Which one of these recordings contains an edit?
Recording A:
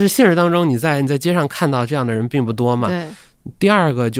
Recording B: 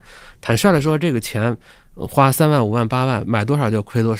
B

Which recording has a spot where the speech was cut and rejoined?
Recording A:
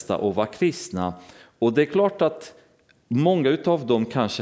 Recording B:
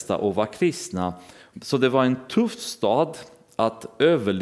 B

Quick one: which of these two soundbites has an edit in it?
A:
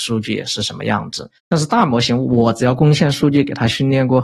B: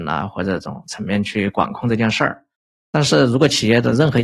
A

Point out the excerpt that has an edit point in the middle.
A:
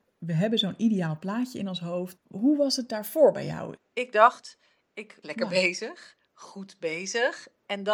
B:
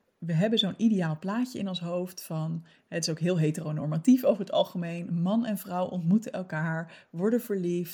A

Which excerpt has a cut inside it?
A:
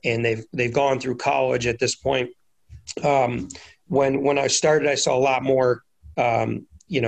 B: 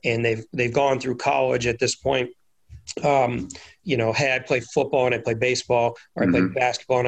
B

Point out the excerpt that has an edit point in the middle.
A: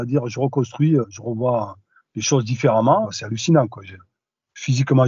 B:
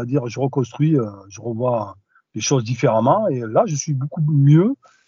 A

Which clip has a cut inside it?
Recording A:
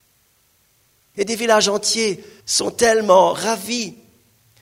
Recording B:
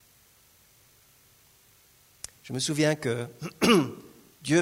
A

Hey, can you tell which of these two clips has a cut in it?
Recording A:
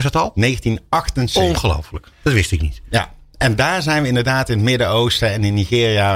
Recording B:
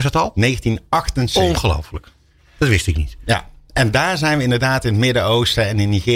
A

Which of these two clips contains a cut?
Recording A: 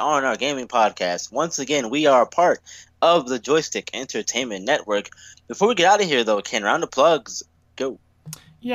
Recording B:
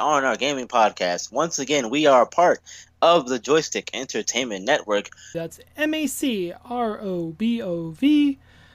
B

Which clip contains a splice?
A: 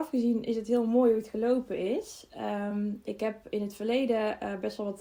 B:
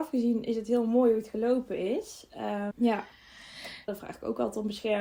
B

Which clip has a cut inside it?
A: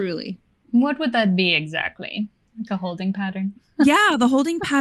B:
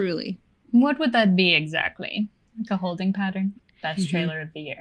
B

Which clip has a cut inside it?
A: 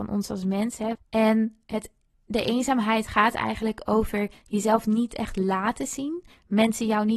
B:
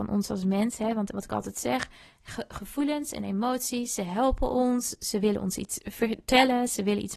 A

